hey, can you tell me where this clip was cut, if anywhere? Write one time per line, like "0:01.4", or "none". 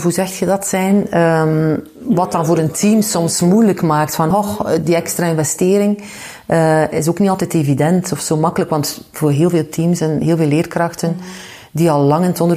none